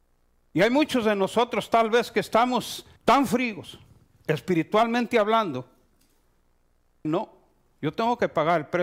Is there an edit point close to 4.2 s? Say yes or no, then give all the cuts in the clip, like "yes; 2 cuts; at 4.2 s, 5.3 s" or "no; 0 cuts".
no; 2 cuts; at 3.0 s, 7.0 s